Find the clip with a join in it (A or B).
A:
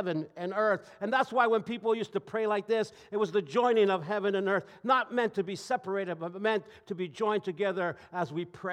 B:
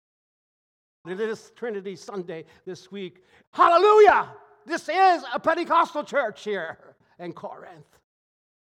B